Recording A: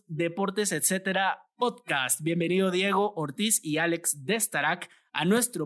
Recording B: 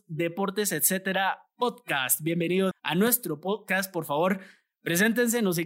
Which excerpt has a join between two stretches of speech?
B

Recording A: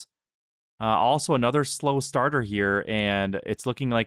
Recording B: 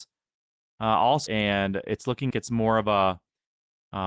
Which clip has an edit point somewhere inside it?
B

